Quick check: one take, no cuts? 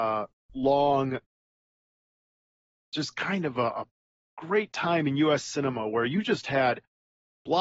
yes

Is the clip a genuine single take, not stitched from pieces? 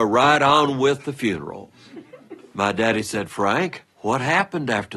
yes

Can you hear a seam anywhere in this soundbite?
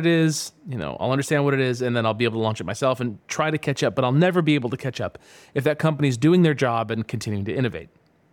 no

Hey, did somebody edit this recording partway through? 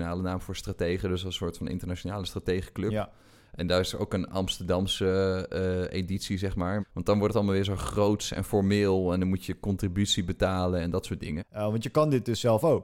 yes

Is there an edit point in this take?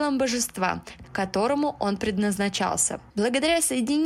yes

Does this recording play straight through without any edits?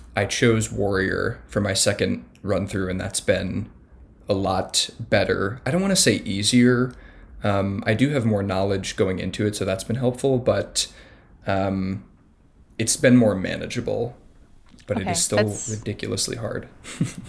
yes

